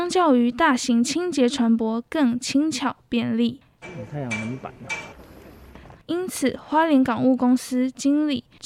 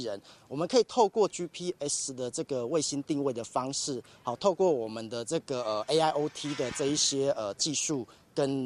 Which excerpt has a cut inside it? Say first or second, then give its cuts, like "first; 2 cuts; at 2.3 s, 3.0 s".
first; 2 cuts; at 3.8 s, 5.9 s